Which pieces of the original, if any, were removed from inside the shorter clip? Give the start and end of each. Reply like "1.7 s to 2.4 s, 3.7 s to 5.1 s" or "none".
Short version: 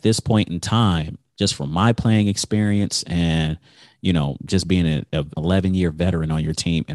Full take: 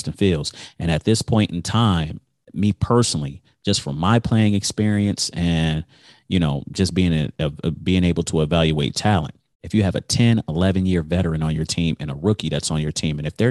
2.3 s to 3.6 s, 7.6 s to 10.5 s